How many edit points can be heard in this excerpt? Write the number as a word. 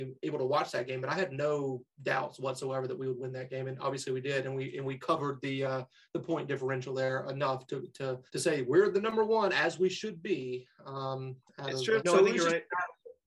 two